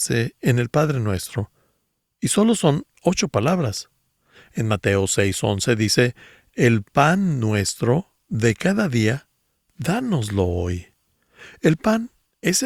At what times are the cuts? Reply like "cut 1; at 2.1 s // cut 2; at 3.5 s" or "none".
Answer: none